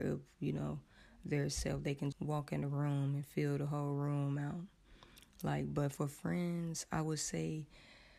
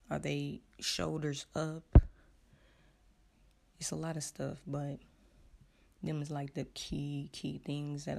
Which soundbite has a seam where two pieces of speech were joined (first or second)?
first